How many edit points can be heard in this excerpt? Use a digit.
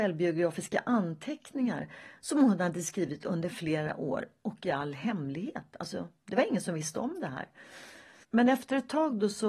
2